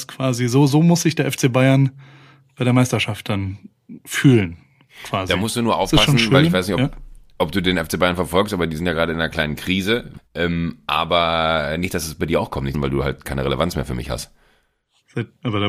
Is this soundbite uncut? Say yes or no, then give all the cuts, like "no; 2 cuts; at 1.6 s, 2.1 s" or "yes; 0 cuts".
no; 2 cuts; at 10.2 s, 12.7 s